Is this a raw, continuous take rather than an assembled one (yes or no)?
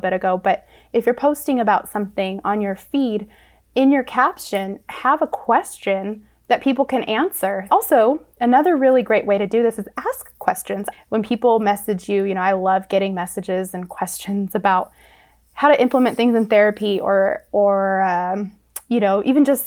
no